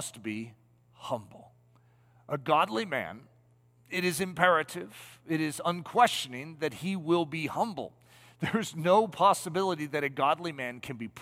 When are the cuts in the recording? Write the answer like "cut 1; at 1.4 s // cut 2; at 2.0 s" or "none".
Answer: none